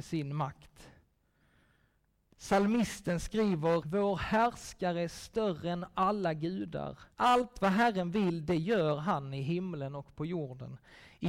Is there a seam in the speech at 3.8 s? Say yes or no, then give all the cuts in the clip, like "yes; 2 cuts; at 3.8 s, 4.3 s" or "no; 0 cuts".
yes; 3 cuts; at 2.3 s, 3.8 s, 7.1 s